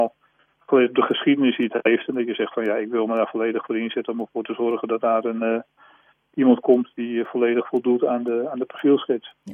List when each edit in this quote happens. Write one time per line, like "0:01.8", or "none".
none

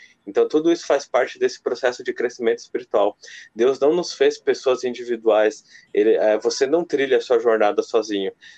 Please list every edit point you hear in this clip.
none

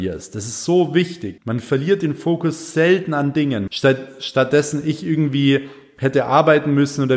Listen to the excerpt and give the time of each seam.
0:01.4
0:03.7

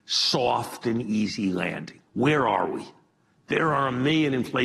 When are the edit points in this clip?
0:02.1

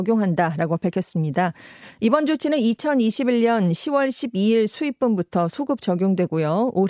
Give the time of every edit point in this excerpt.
none

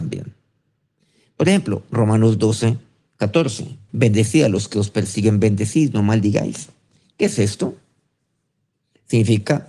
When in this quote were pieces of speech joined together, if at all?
0:03.9

